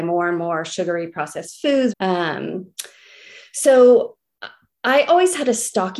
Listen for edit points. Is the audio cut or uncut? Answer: cut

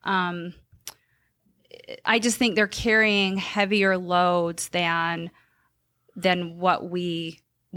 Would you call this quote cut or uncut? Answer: uncut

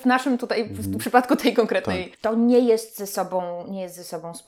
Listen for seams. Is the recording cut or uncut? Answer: cut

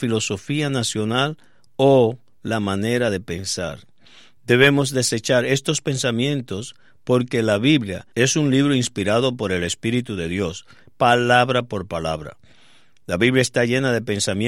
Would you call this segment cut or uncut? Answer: cut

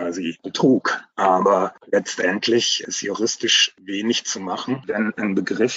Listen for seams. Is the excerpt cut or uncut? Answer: uncut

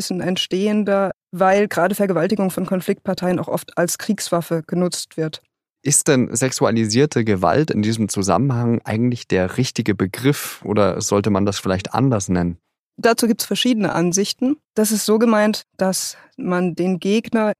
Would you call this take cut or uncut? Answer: cut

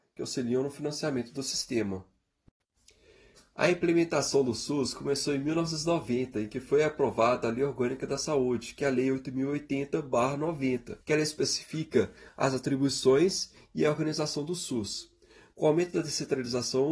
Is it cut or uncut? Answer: cut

